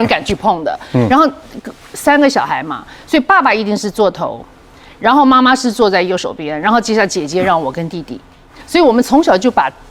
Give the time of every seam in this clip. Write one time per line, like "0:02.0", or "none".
none